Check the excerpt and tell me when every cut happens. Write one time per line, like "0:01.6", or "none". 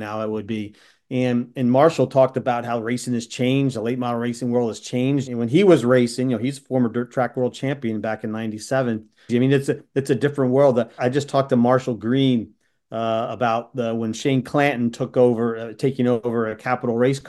0:05.3
0:09.3
0:11.0